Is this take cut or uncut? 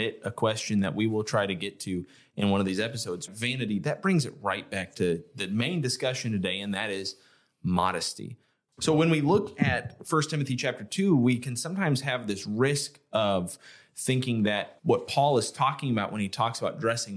cut